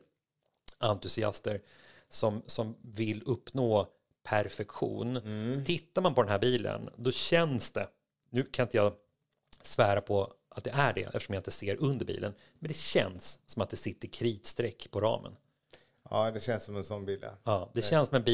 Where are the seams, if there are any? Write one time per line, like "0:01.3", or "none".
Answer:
none